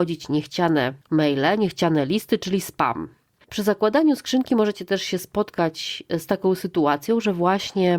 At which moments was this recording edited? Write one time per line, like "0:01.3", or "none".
0:03.4